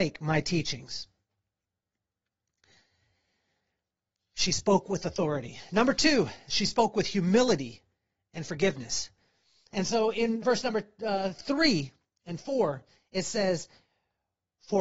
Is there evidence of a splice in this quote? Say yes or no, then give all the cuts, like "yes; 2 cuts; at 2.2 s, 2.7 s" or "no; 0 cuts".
yes; 1 cut; at 10.4 s